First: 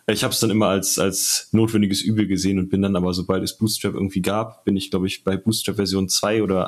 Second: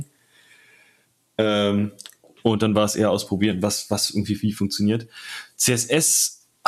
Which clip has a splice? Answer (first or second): second